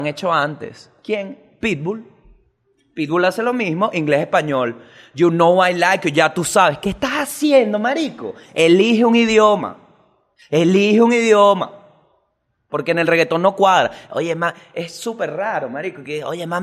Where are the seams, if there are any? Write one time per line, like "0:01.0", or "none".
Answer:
none